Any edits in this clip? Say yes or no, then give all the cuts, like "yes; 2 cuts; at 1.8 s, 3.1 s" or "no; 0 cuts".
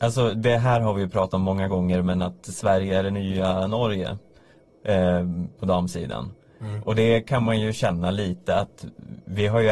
no; 0 cuts